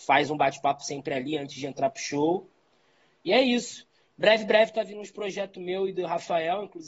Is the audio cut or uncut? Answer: uncut